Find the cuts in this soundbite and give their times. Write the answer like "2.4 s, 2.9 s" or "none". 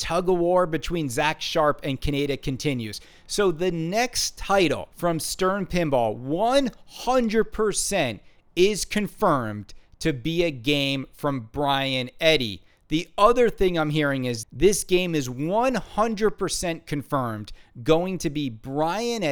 14.4 s